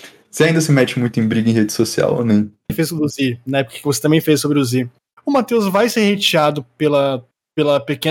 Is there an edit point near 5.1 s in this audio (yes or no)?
yes